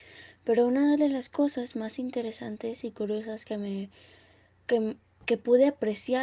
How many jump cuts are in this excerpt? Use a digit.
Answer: 0